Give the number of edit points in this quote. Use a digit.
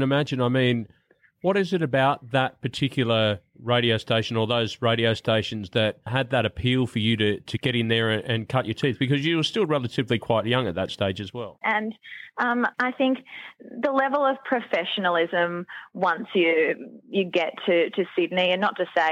2